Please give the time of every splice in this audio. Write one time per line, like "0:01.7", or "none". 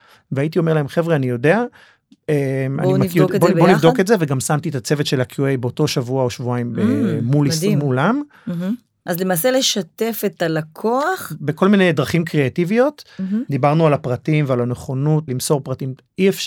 0:09.1
0:13.5
0:15.3

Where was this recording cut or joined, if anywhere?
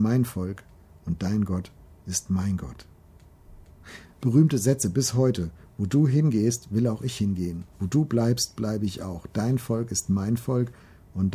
0:04.2

